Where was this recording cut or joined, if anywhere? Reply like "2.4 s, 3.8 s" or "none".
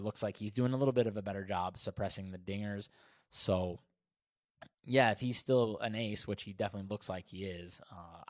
none

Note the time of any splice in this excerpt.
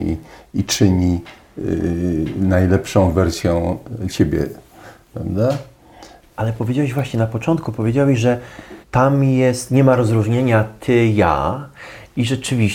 6.2 s, 8.8 s

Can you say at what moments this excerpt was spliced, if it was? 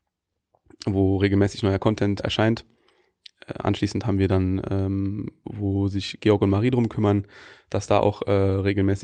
2.2 s, 5.4 s

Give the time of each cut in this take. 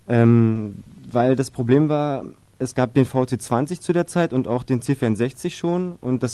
none

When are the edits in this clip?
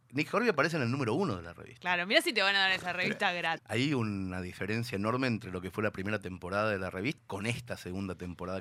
3.6 s, 7.2 s

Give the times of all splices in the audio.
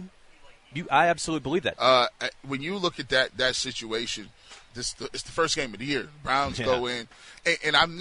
1.8 s, 4.7 s

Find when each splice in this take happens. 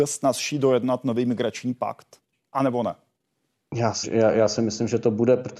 4.0 s

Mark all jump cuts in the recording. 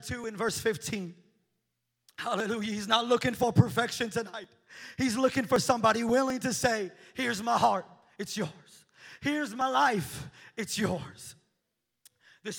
2.0 s

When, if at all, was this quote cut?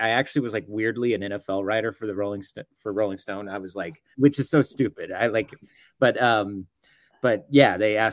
4.1 s

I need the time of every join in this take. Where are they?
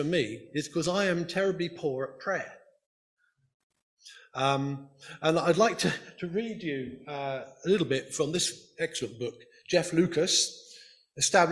none

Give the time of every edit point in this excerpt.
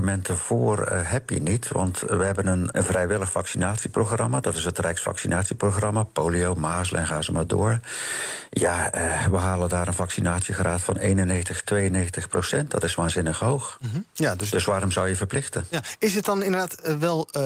2.7 s

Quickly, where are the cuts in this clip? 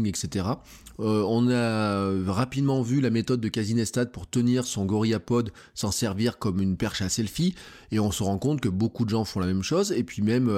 0.9 s

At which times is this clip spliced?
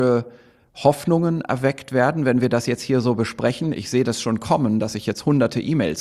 none

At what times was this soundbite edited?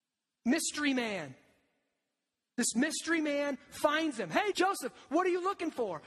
4.5 s

